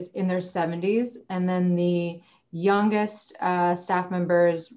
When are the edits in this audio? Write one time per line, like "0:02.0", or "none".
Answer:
none